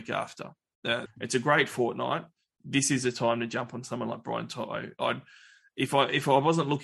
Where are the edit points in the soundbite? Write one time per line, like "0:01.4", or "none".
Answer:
0:01.1